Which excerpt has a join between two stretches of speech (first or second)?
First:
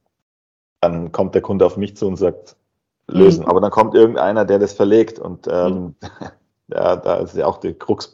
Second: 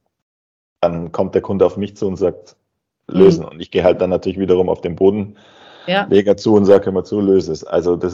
first